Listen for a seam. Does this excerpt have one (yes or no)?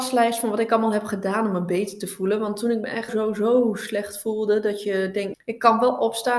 yes